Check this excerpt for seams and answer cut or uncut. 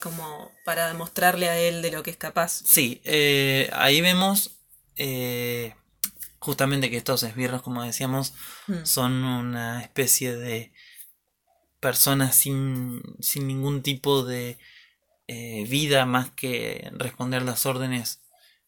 uncut